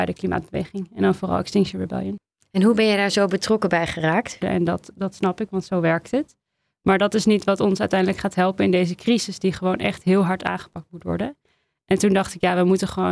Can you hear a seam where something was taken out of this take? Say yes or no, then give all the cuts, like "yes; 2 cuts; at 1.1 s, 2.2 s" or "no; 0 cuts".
yes; 1 cut; at 4.4 s